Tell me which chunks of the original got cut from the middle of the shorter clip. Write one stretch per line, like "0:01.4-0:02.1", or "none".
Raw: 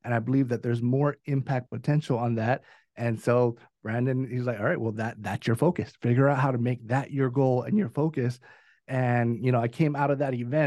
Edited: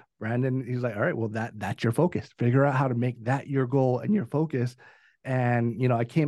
none